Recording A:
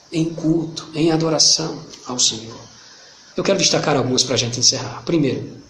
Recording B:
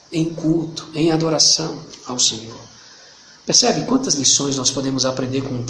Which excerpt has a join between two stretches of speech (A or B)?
A